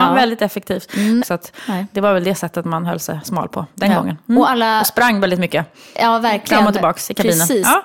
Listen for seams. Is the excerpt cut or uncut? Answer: cut